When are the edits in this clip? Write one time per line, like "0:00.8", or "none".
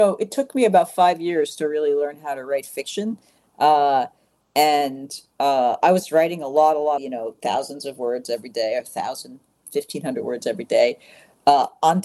0:07.0